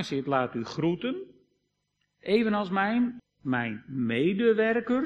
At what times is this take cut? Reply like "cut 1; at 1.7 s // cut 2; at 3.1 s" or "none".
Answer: cut 1; at 3.2 s